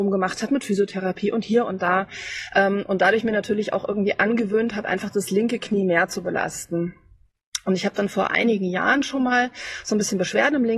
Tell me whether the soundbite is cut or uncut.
uncut